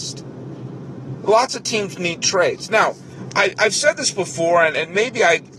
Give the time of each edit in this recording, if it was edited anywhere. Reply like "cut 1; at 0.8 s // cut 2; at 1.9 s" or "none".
cut 1; at 1.2 s

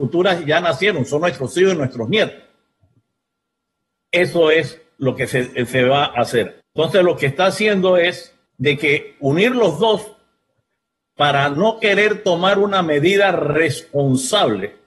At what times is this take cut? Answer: cut 1; at 6.6 s // cut 2; at 8.5 s

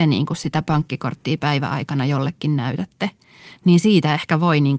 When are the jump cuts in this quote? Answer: none

